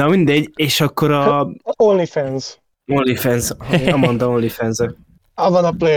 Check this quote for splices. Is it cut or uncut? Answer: uncut